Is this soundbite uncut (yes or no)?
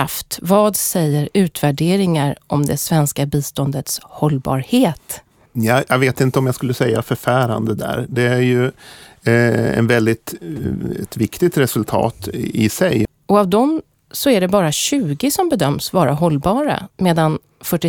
no